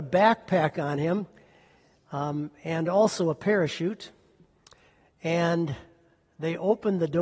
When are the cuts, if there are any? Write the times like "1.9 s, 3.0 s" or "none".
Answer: none